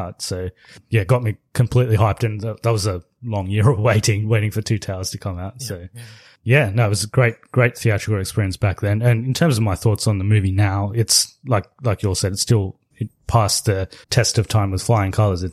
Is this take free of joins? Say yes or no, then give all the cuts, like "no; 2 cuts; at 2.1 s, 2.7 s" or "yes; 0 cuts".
no; 2 cuts; at 12.9 s, 14.0 s